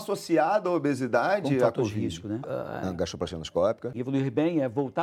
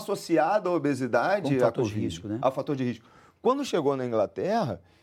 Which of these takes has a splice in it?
first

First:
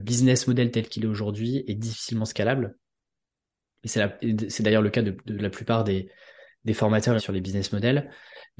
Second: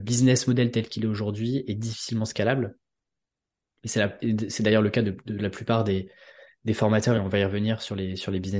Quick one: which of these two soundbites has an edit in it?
first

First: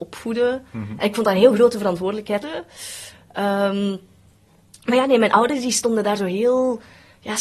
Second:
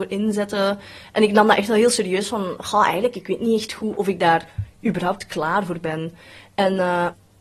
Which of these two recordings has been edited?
first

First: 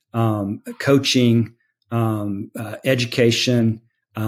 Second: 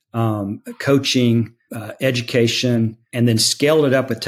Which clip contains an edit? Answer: second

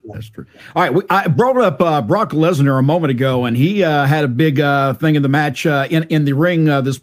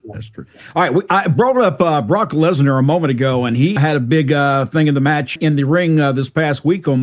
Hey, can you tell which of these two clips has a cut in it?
second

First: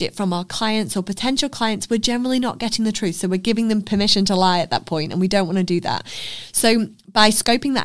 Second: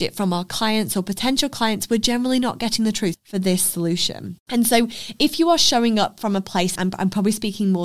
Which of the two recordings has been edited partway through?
second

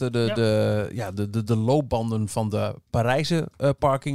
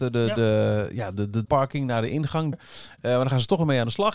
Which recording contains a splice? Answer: second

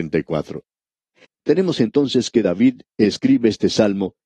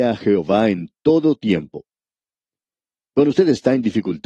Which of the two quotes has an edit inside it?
first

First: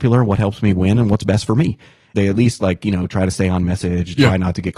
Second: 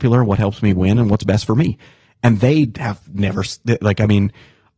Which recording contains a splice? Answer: first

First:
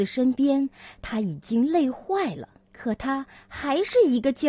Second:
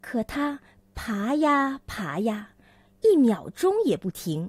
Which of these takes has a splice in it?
first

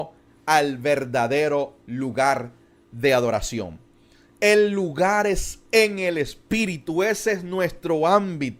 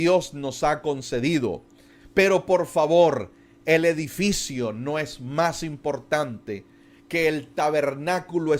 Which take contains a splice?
first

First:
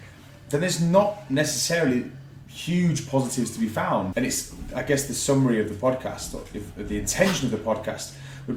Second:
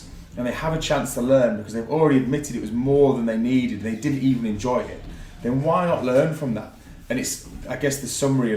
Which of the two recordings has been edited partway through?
first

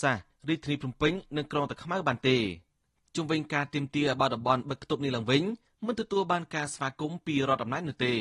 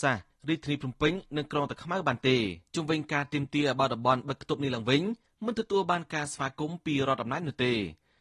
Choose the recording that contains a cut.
second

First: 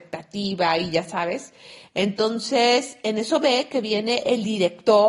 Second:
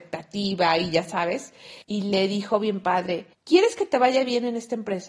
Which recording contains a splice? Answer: second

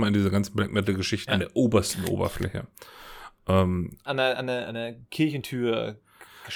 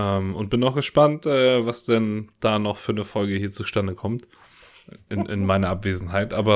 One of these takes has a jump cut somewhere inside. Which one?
first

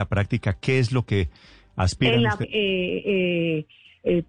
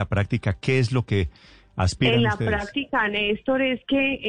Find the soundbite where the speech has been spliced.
first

